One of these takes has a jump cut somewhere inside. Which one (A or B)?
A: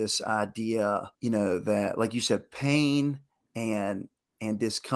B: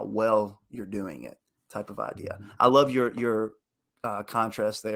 A